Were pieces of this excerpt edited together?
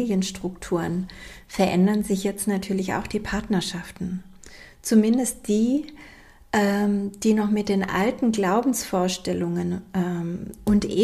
no; 0 cuts

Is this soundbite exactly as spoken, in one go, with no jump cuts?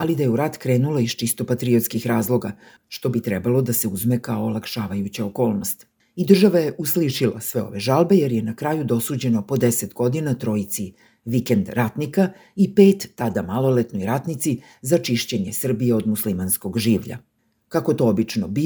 yes; 0 cuts

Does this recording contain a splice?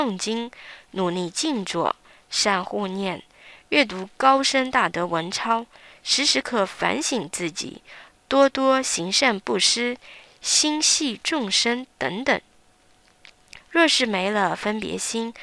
yes; 2 cuts; at 6.4 s, 13.6 s

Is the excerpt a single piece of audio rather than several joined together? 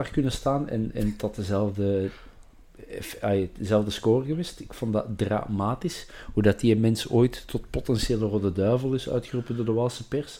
yes; 0 cuts

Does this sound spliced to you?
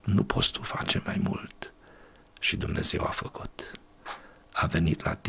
no; 0 cuts

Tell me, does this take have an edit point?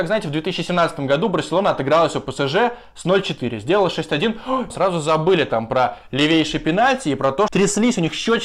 yes; 2 cuts; at 4.7 s, 7.5 s

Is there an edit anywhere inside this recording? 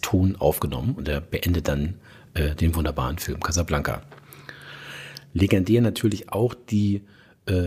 no; 0 cuts

